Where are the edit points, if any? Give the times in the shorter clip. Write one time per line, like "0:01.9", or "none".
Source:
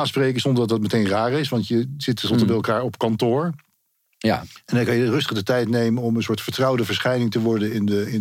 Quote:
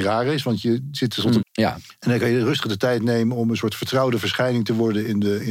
0:01.4